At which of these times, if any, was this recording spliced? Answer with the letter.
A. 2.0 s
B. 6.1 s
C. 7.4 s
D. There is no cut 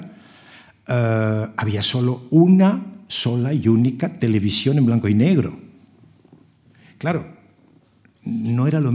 D